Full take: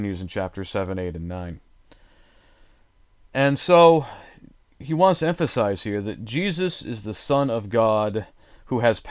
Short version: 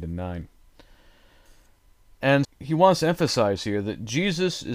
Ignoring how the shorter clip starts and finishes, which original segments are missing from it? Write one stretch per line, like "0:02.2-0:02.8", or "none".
0:03.6-0:04.6